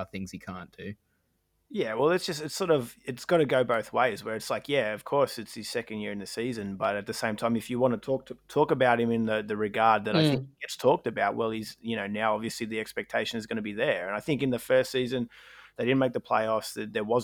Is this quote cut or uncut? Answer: uncut